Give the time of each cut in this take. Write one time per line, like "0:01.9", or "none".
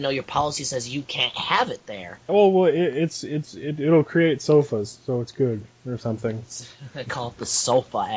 0:02.3